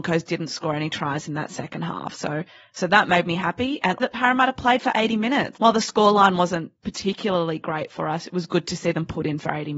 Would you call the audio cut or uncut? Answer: cut